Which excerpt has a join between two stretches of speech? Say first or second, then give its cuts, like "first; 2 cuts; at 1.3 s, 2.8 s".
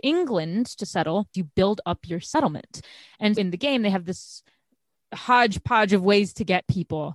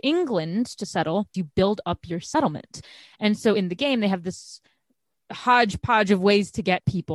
first; 1 cut; at 3.4 s